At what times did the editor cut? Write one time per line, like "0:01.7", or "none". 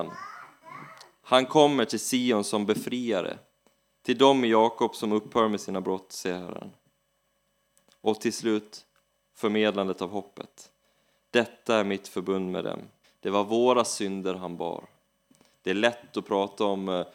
0:13.0
0:15.5